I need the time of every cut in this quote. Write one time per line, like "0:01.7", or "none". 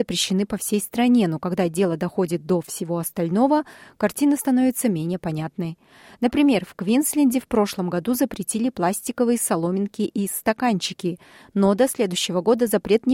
none